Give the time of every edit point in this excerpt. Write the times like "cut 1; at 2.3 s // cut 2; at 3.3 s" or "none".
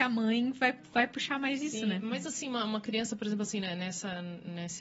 none